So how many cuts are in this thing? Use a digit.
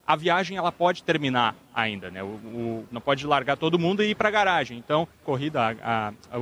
2